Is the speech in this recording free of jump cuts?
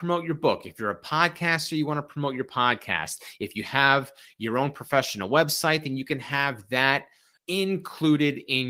no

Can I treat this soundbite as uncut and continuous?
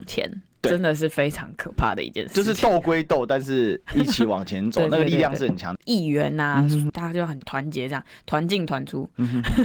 no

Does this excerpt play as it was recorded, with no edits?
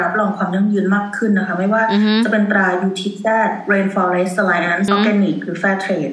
no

